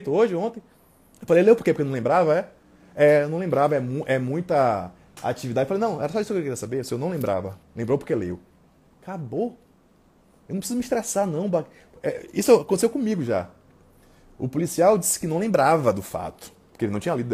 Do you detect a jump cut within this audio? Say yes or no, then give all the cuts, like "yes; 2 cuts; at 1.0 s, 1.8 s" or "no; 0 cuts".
yes; 1 cut; at 1.1 s